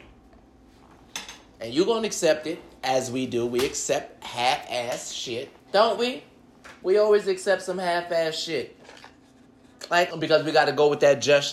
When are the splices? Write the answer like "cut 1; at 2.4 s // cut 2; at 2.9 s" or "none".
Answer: cut 1; at 5.6 s // cut 2; at 10.1 s